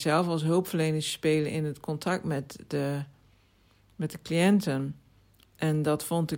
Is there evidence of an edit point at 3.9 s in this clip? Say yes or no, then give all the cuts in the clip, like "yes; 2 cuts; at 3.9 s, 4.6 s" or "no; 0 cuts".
no; 1 cut; at 5.4 s